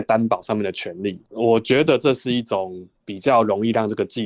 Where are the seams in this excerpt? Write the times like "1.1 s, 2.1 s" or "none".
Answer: 1.2 s